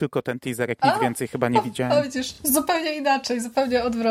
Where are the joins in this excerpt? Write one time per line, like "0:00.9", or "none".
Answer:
none

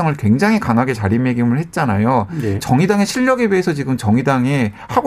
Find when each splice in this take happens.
0:02.6

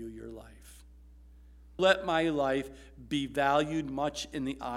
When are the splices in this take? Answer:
0:01.8

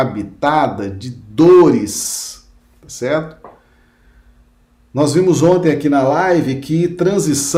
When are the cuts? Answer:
none

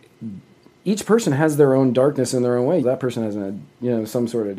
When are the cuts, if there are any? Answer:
0:02.8

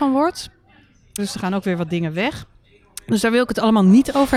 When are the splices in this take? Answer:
0:01.2

